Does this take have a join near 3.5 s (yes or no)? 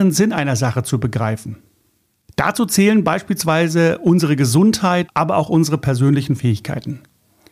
no